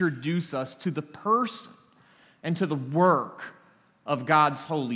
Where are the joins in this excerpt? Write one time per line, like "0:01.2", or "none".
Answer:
none

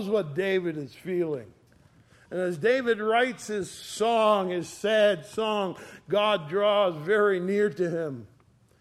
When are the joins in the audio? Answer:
none

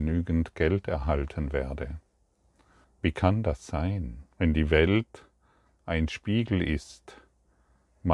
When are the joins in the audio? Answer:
0:02.8
0:04.3

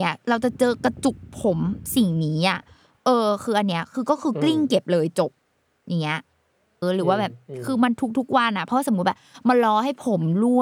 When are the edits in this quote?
0:06.8

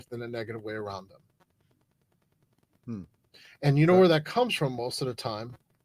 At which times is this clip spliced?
none

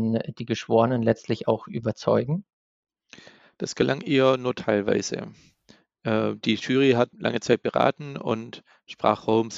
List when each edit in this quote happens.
0:07.1

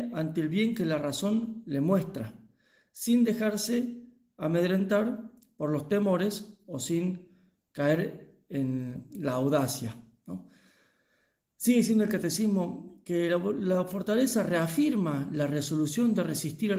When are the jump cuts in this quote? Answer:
none

